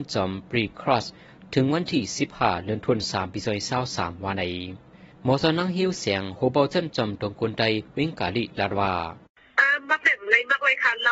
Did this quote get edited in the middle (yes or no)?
no